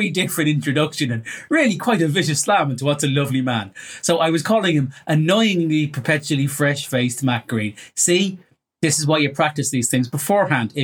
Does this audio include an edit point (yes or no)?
no